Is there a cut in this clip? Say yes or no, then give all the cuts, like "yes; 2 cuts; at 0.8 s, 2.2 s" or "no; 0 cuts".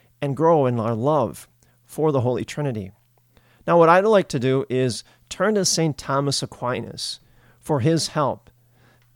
no; 0 cuts